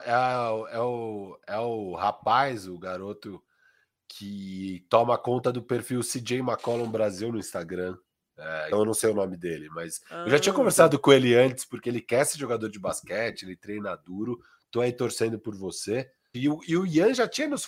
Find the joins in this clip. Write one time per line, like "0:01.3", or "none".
0:08.7
0:16.3